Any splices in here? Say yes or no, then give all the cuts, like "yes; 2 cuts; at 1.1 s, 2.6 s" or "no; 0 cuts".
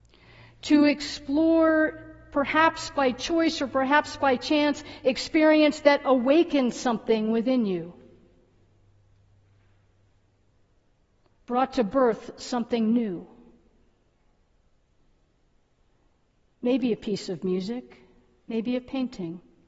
no; 0 cuts